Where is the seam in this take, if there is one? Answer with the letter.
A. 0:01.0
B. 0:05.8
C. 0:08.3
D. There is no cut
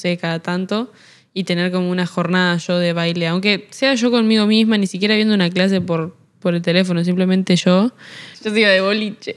C